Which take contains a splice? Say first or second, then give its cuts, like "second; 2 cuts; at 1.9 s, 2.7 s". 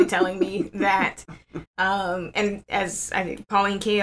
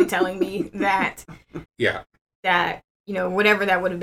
second; 1 cut; at 1.7 s